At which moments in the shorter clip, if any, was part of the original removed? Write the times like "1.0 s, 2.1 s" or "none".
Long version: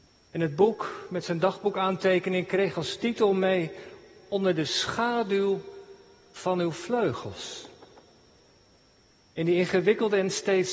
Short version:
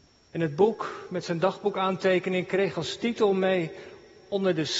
none

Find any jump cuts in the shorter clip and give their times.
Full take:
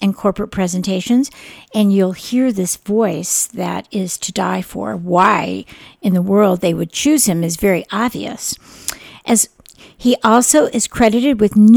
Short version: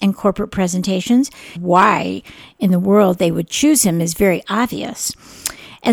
1.6 s

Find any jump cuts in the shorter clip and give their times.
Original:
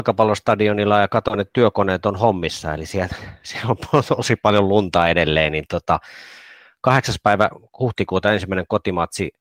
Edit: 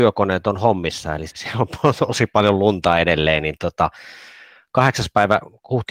1.3 s

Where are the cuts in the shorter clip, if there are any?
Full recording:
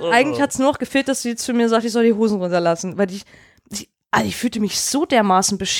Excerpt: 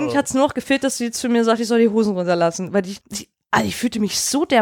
3.0 s

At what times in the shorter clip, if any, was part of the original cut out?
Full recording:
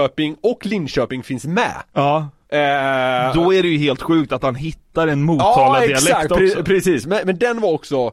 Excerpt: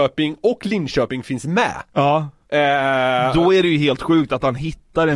none

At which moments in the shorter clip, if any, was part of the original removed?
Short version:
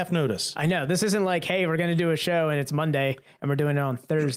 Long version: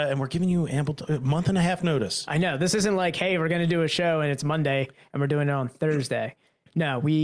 none

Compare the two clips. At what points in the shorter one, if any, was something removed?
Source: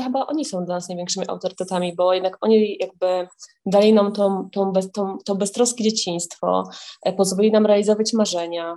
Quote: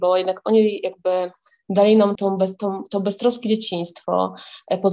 2.2 s

